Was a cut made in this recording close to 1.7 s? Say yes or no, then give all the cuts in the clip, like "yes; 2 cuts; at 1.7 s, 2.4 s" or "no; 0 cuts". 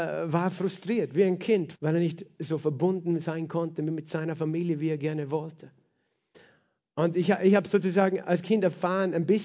yes; 1 cut; at 1.7 s